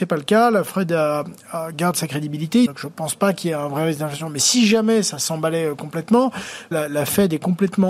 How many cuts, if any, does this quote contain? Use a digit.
2